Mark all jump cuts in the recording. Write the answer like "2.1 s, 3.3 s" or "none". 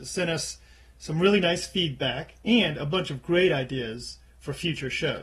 none